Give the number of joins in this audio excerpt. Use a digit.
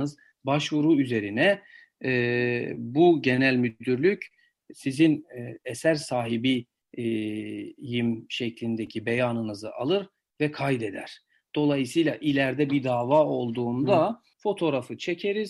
2